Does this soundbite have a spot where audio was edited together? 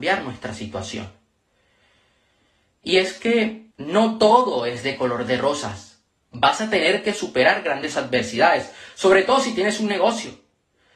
yes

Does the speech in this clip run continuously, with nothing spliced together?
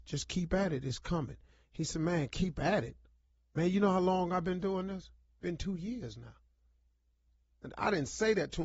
yes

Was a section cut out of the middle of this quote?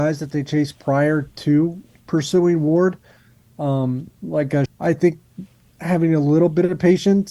yes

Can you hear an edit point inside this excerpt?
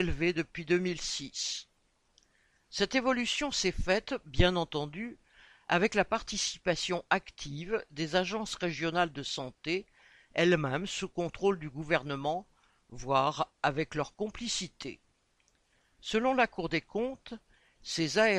no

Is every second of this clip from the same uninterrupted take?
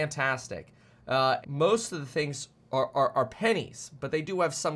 no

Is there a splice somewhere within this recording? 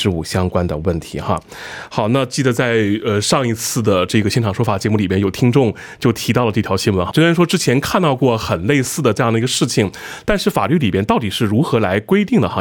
yes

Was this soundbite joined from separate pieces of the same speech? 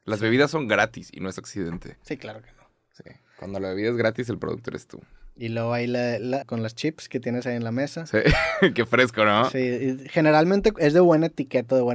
yes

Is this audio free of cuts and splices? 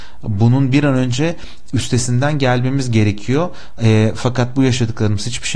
yes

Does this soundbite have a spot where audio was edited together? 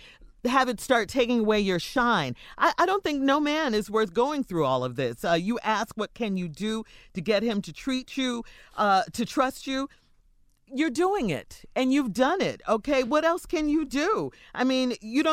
no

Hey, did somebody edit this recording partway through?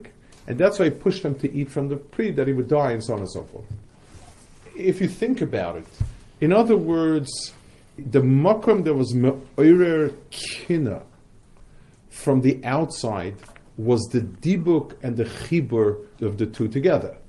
yes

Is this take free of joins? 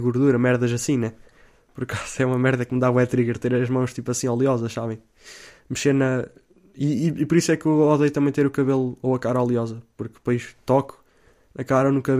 yes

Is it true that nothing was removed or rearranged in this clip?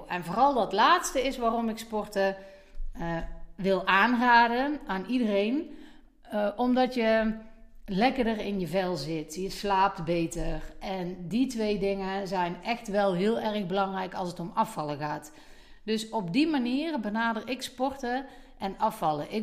yes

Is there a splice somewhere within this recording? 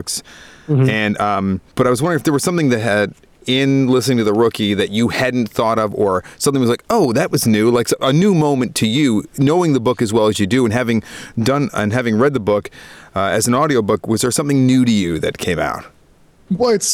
no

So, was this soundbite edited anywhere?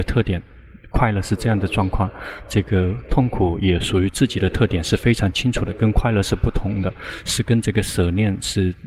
no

